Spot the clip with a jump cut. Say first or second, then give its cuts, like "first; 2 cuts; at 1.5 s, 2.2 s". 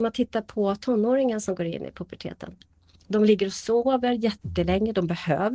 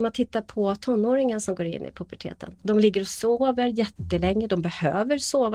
second; 1 cut; at 2.6 s